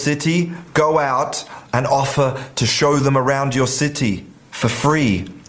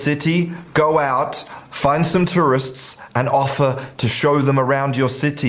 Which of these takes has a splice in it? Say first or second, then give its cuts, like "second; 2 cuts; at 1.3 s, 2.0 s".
first; 1 cut; at 1.7 s